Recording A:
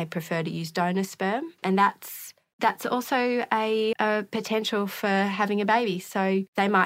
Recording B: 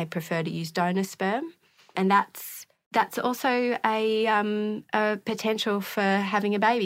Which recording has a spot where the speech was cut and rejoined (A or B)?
A